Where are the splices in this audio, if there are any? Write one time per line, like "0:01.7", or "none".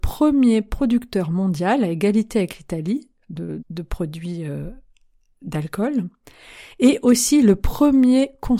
0:03.6